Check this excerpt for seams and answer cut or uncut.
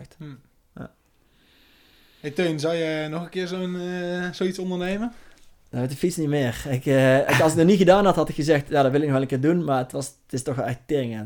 uncut